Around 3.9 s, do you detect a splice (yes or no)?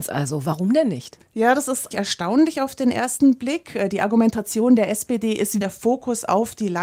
no